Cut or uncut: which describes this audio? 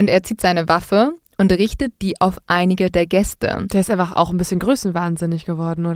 uncut